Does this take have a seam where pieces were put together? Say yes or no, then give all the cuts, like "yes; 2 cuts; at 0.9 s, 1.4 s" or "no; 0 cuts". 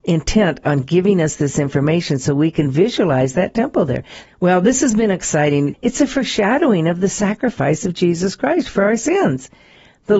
yes; 2 cuts; at 4.3 s, 5.7 s